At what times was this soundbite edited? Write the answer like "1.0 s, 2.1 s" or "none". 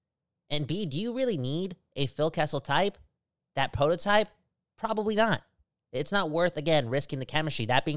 none